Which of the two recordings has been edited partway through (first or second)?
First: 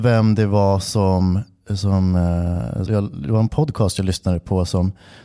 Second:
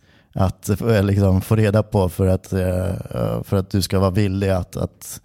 first